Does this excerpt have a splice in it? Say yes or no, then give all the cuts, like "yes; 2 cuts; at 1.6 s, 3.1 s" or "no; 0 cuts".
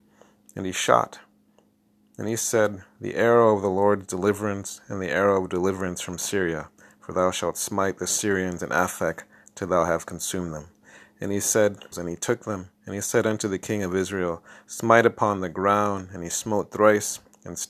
yes; 1 cut; at 11.9 s